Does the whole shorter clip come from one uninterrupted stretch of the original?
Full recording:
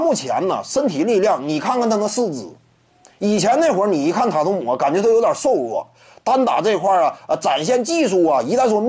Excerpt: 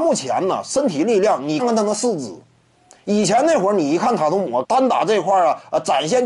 no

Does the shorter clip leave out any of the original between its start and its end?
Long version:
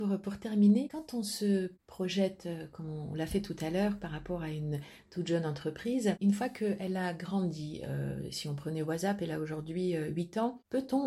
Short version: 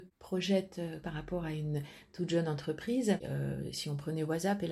yes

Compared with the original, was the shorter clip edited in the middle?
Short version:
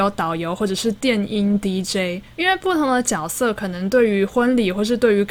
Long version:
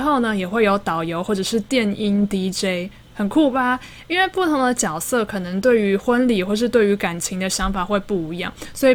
yes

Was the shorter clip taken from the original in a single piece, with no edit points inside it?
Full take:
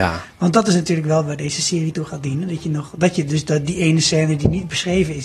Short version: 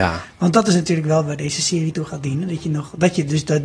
yes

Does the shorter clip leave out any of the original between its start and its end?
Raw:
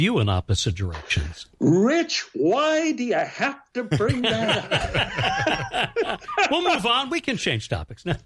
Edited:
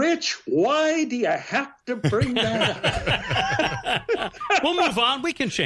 no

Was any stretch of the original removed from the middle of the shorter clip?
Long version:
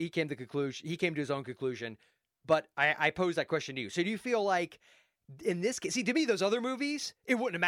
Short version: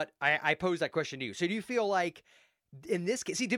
no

